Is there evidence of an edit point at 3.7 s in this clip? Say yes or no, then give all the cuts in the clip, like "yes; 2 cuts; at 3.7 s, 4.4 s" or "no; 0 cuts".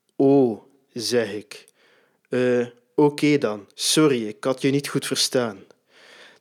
yes; 1 cut; at 3.7 s